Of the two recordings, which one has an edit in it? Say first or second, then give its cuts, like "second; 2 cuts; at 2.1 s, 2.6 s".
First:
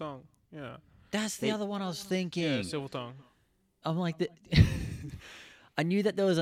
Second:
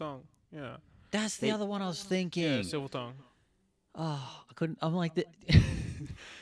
first; 1 cut; at 3.8 s